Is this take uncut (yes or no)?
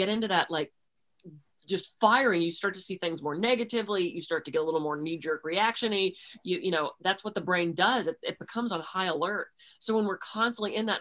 yes